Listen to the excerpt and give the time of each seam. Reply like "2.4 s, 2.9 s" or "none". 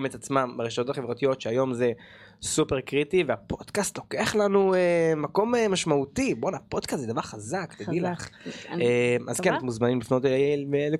none